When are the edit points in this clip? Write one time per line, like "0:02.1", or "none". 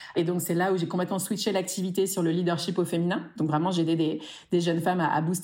none